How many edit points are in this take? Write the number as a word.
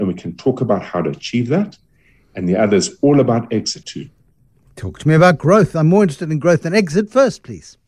one